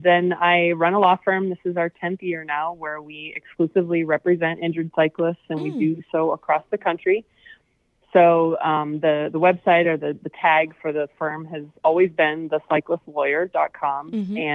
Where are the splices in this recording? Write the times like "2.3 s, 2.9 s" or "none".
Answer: none